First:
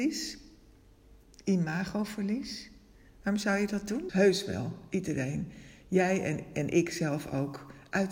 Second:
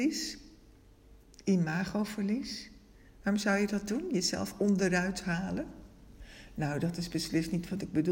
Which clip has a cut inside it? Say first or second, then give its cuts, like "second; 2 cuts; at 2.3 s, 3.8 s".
first; 1 cut; at 4.1 s